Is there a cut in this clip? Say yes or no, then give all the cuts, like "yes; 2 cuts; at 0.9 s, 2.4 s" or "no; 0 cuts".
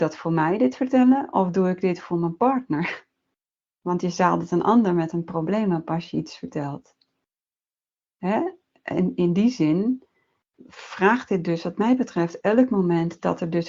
no; 0 cuts